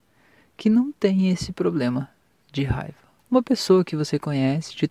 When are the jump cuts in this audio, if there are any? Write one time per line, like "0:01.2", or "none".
0:03.2